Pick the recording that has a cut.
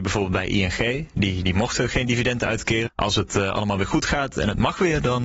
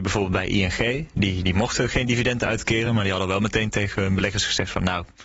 first; 1 cut; at 2.9 s

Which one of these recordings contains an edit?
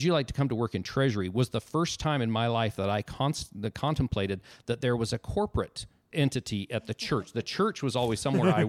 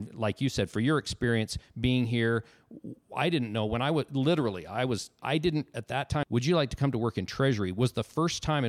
second; 2 cuts; at 5.2 s, 6.2 s

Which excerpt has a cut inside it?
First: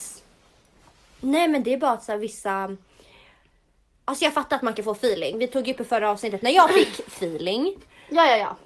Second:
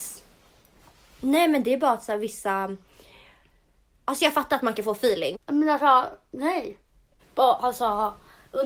second; 2 cuts; at 5.3 s, 7.2 s

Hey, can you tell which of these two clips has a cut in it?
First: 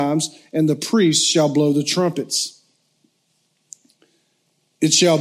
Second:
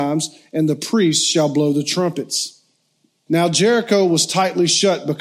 second; 1 cut; at 3.3 s

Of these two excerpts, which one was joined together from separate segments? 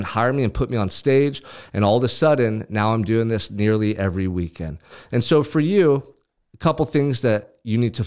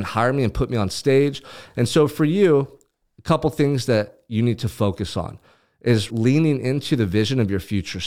second; 2 cuts; at 1.7 s, 6.1 s

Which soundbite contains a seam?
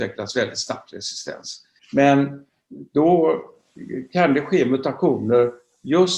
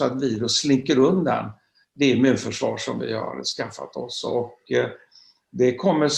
first; 1 cut; at 1.8 s

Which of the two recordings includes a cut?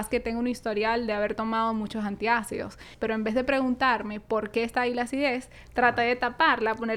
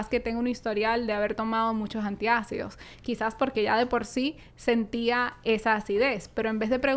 first; 1 cut; at 2.9 s

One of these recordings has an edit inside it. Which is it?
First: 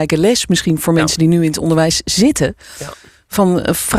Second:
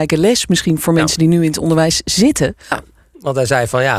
second; 1 cut; at 2.7 s

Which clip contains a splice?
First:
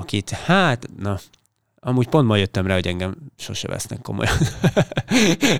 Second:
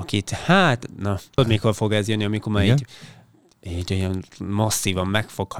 second; 1 cut; at 1.4 s

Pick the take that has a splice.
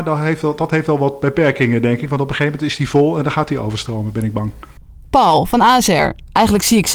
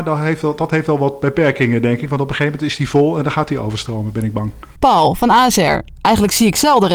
second; 1 cut; at 4.8 s

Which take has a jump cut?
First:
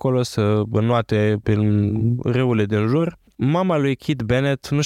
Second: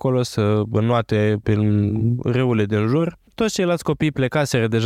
first; 1 cut; at 3.3 s

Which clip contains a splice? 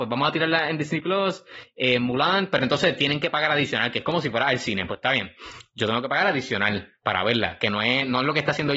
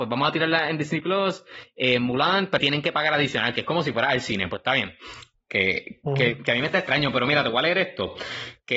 second; 2 cuts; at 2.6 s, 5.3 s

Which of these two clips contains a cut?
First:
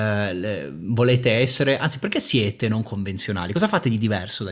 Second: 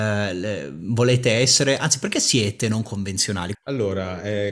second; 1 cut; at 3.5 s

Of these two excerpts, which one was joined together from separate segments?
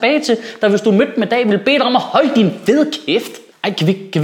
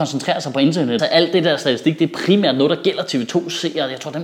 second; 1 cut; at 1.0 s

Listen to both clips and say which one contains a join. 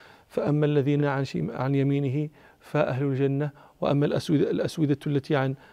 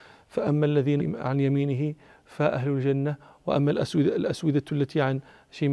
second; 1 cut; at 1.0 s

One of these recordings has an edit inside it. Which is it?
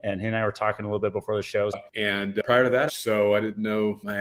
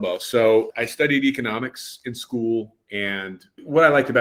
first; 2 cuts; at 1.7 s, 2.9 s

